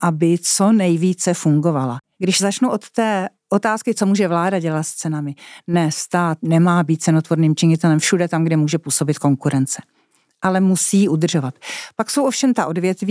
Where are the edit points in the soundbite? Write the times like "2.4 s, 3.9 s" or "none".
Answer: 2.1 s